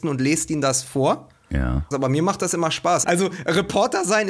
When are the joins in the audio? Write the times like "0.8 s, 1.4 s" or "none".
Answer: 1.9 s, 3.0 s